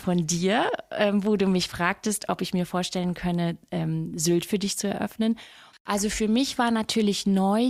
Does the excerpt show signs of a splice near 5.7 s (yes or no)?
yes